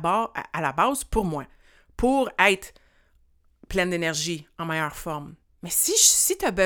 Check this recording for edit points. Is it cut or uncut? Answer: uncut